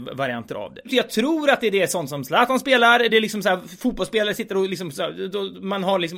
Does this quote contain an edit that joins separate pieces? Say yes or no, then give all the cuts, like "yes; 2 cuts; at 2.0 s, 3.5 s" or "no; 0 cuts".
no; 0 cuts